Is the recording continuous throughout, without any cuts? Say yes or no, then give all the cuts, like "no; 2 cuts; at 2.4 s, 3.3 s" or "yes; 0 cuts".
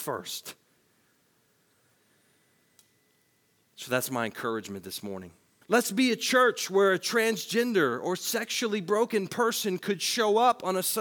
no; 1 cut; at 5.6 s